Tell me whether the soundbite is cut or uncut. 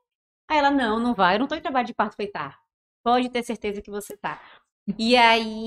uncut